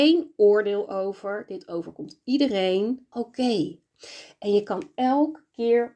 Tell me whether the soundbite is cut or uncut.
cut